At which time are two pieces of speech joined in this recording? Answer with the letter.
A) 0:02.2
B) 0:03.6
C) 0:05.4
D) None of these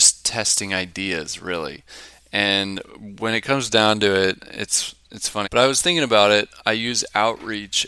C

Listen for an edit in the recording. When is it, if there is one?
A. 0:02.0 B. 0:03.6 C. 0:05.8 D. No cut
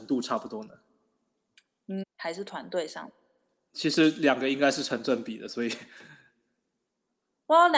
A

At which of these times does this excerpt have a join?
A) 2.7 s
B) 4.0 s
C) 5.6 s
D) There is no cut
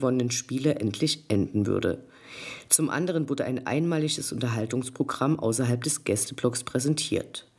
D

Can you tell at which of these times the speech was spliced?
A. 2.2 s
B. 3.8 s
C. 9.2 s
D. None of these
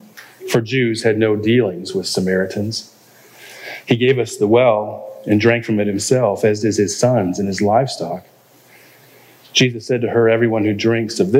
B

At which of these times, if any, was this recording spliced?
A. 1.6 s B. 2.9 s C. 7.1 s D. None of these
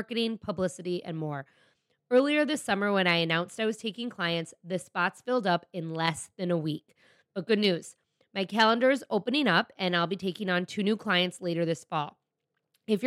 D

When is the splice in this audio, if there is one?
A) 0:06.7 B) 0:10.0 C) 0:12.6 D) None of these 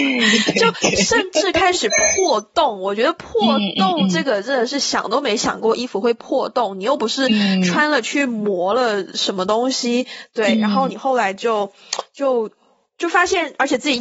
D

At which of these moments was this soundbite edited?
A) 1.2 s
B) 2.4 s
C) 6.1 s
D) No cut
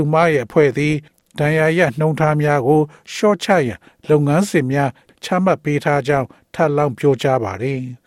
D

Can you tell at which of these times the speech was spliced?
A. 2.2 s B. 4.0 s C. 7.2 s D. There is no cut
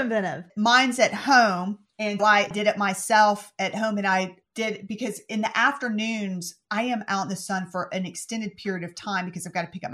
A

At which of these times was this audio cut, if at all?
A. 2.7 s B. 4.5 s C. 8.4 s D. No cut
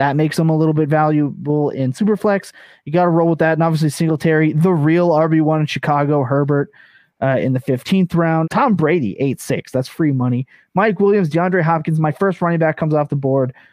C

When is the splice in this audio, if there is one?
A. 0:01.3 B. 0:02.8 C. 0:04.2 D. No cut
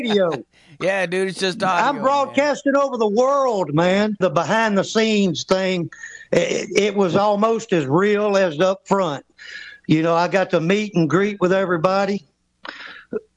C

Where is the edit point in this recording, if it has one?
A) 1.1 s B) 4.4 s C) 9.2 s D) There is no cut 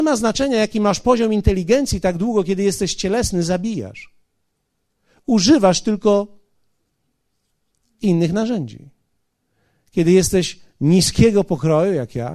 D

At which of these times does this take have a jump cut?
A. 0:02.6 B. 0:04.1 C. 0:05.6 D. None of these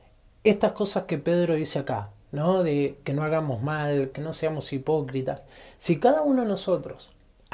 B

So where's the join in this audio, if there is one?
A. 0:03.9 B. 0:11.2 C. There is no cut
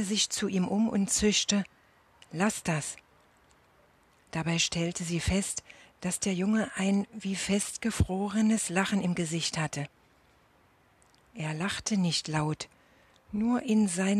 C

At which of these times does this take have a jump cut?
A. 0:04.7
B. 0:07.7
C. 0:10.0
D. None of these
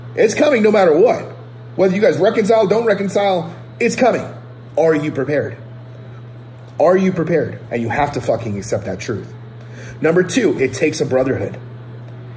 B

